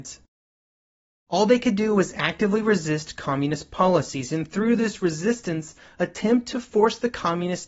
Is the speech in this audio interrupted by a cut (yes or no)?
yes